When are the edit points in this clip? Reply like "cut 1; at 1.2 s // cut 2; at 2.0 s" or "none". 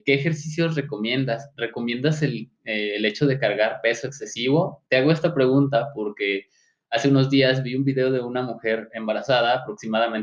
none